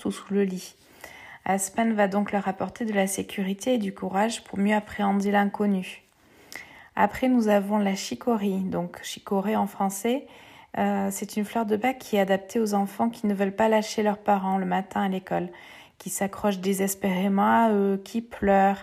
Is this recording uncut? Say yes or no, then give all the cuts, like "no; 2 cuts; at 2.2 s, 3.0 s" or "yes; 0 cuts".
yes; 0 cuts